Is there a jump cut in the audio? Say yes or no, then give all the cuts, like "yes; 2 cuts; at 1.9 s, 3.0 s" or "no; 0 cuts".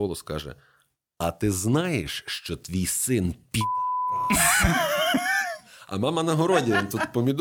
no; 0 cuts